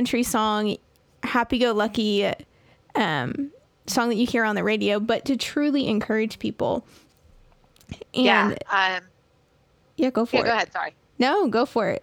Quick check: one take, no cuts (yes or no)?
yes